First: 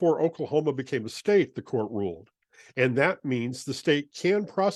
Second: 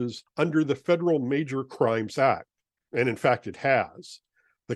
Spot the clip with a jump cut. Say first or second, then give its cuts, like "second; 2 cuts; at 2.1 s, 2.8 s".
second; 1 cut; at 2.8 s